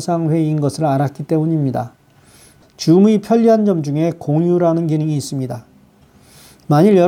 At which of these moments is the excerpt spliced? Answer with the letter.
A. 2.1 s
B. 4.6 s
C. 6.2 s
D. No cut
D